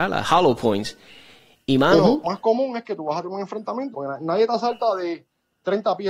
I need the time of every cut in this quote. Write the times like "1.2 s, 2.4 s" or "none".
2.2 s, 3.9 s